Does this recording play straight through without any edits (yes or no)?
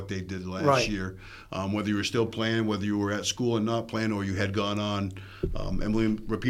yes